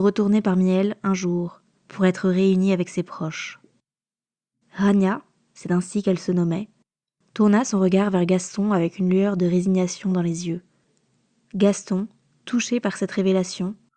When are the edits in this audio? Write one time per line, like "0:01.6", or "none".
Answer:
0:04.6
0:11.4